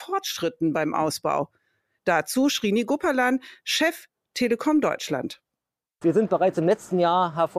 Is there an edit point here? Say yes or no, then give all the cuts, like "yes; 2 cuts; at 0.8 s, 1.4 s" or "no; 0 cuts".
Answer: yes; 2 cuts; at 2.0 s, 6.0 s